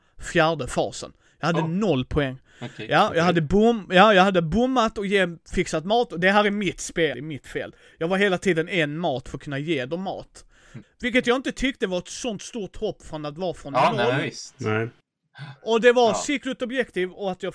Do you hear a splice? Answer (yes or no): yes